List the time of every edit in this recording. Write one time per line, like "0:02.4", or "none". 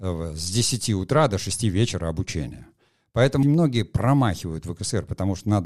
0:03.4